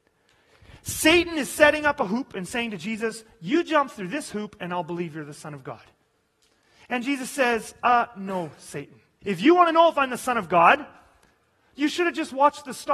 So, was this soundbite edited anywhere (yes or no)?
yes